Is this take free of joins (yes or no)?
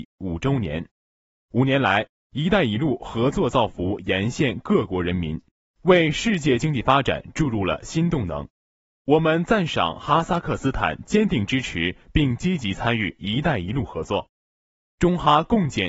yes